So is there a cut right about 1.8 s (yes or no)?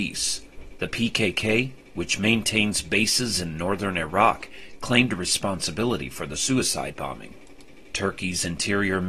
no